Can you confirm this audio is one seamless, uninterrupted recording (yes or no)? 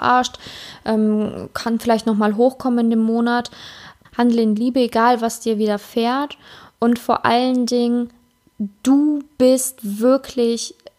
no